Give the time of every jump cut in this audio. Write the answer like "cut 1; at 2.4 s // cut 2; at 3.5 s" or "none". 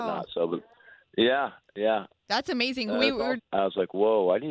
cut 1; at 3.4 s